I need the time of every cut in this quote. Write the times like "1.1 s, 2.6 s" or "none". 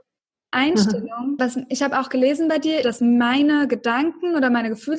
1.4 s, 2.8 s